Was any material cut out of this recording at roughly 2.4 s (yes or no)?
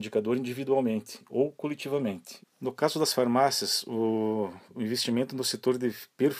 yes